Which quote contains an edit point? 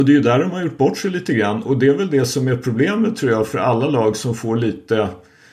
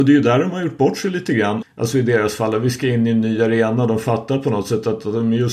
second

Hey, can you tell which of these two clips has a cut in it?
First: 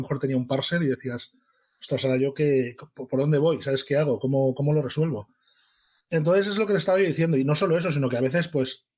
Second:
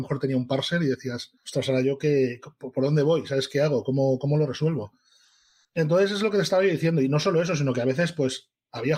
second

